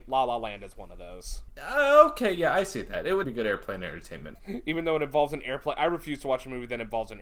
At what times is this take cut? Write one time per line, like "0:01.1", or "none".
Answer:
0:03.2
0:04.4